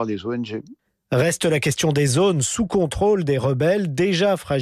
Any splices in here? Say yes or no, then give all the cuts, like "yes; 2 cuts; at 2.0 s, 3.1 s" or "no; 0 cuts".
no; 0 cuts